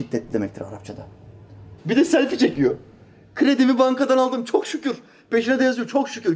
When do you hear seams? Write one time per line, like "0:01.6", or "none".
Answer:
0:01.8